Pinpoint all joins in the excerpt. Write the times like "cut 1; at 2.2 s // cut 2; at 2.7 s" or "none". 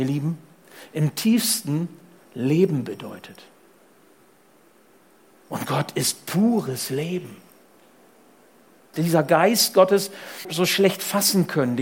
cut 1; at 8.9 s // cut 2; at 10.4 s